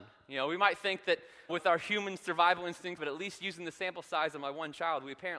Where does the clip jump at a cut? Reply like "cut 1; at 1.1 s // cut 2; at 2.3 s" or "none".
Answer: cut 1; at 1.5 s // cut 2; at 3.0 s